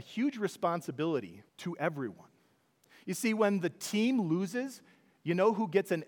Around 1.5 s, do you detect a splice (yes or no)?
yes